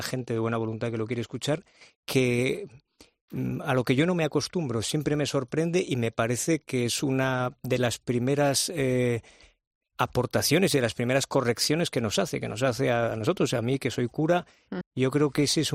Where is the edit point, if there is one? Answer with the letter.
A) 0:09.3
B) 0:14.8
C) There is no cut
B